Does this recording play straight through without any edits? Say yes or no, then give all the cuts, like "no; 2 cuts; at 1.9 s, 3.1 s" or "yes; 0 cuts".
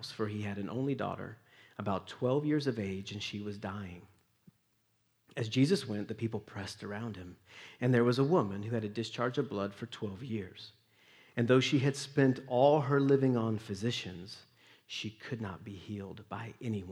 yes; 0 cuts